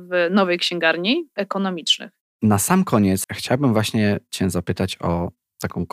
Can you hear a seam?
yes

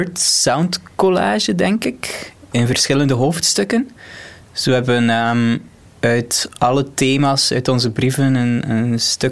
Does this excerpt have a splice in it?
no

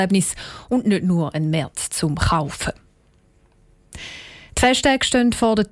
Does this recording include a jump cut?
no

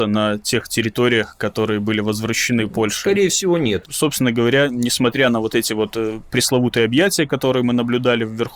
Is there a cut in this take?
yes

